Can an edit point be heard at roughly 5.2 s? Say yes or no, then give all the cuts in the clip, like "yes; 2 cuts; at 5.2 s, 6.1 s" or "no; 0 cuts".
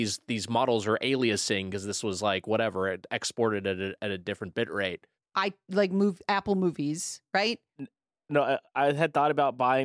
yes; 2 cuts; at 5.2 s, 7.8 s